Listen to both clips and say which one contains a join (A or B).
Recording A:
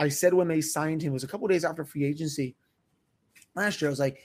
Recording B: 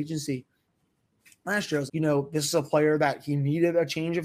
B